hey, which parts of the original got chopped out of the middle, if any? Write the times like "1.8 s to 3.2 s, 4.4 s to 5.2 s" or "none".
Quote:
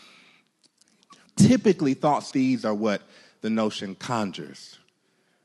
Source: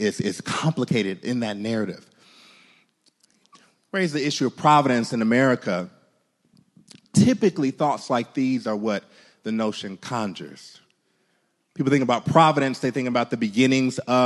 3.7 s to 7.0 s, 8.1 s to 8.3 s

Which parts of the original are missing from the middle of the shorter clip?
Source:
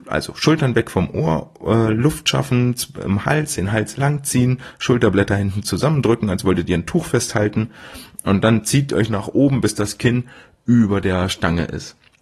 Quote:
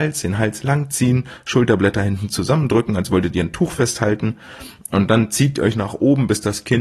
none

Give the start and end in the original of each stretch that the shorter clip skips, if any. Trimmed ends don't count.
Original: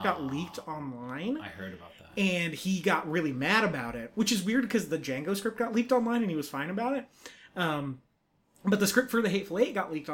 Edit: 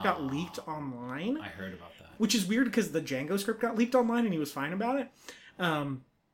2.1 s to 4.1 s

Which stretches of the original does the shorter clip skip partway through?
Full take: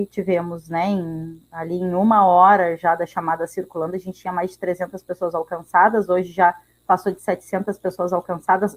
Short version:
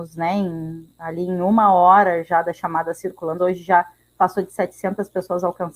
3.9 s to 6.1 s

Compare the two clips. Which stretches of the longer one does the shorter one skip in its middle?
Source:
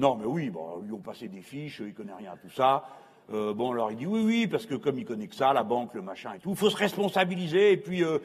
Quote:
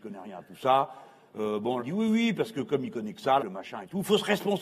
3.7 s to 3.9 s, 5.5 s to 5.9 s

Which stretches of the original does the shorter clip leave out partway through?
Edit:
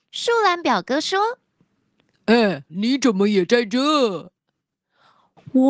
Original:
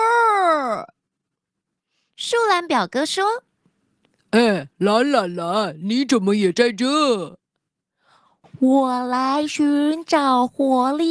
4.7 s to 5.8 s

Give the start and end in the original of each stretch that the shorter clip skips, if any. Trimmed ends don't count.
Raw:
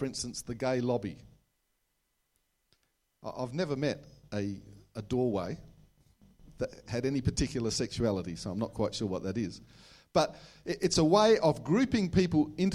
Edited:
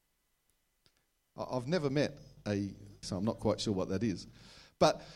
4.9 s to 8.4 s

